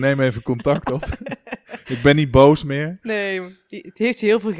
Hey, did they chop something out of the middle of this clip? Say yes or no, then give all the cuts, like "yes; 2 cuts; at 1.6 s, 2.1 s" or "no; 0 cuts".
no; 0 cuts